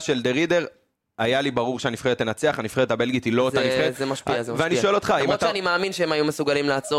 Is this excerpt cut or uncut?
uncut